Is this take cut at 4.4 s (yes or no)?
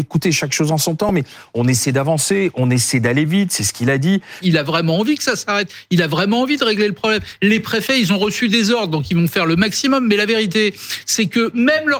yes